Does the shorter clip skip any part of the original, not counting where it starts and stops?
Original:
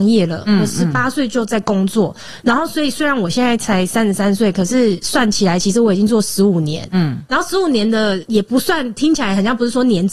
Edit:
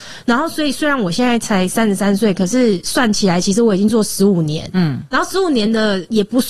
no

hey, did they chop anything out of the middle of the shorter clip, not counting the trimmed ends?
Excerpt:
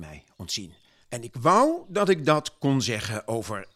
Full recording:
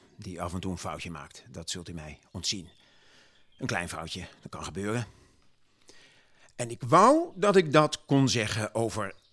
yes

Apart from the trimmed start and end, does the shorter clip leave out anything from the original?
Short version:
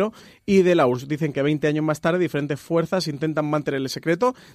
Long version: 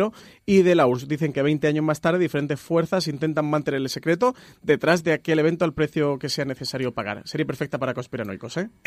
no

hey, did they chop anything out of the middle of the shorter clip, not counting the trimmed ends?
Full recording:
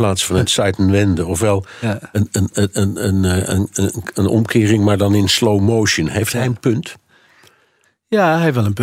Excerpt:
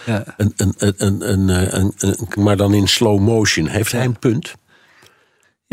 yes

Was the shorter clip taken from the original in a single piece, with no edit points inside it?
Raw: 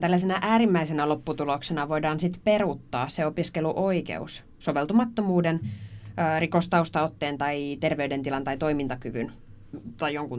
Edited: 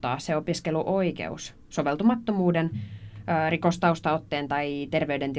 yes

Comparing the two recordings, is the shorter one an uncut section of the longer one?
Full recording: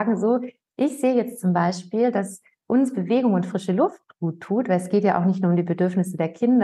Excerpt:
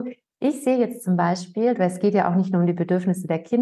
no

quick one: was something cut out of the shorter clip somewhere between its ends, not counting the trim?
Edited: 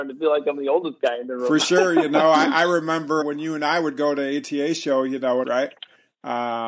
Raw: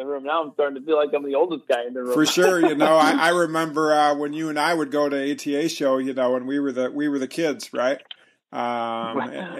yes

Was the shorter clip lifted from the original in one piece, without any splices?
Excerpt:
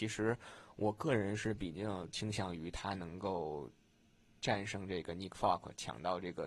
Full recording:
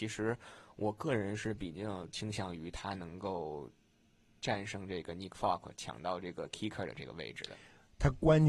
yes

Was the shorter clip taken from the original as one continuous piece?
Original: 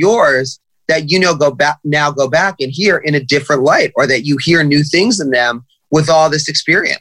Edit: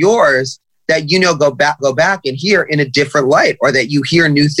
no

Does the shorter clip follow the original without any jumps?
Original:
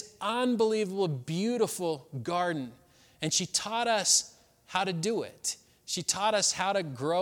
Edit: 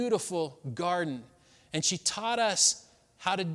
yes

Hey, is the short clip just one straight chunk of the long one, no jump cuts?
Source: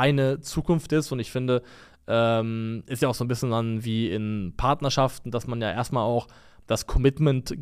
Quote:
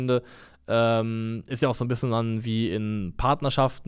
yes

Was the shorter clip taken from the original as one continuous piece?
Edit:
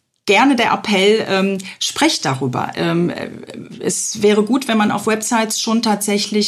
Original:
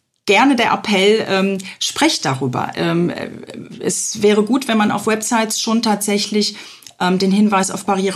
yes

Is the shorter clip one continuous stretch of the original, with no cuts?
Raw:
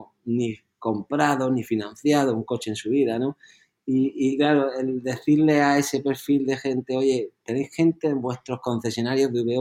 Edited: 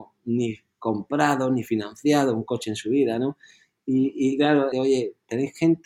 no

